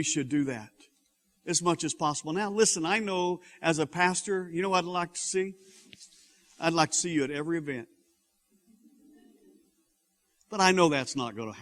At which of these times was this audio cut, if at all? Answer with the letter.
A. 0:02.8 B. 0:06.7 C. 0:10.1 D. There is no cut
D